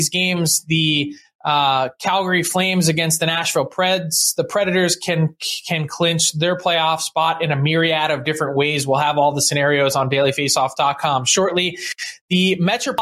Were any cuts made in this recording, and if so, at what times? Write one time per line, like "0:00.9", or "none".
none